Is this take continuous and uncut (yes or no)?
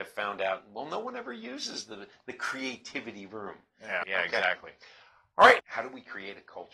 no